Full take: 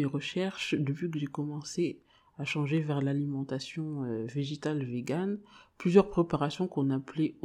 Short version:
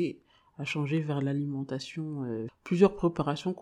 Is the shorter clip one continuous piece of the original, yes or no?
no